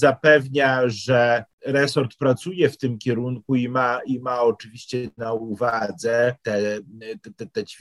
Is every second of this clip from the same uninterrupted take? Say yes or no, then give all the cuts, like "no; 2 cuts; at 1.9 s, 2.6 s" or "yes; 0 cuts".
yes; 0 cuts